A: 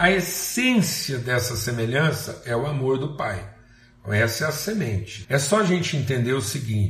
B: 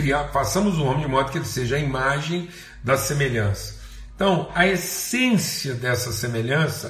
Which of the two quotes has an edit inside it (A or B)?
A